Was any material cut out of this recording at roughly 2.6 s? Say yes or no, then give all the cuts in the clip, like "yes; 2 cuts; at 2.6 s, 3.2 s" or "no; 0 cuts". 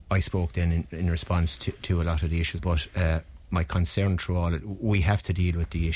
yes; 1 cut; at 2.6 s